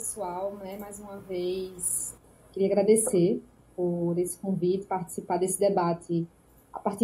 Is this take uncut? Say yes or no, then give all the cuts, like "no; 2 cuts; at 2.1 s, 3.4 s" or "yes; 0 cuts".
yes; 0 cuts